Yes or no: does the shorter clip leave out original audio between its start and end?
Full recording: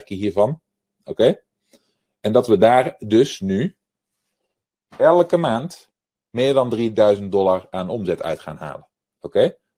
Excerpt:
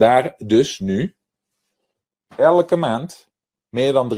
no